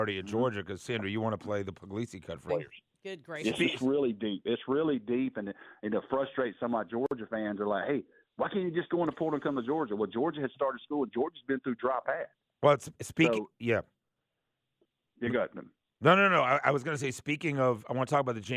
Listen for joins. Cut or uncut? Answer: cut